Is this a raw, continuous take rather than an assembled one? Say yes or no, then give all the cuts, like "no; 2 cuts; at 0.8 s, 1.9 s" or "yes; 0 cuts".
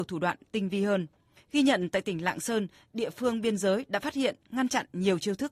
yes; 0 cuts